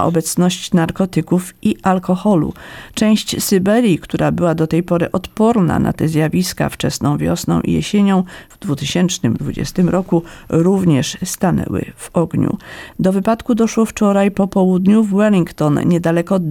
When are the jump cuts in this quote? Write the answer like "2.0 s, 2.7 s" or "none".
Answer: 2.9 s, 12.9 s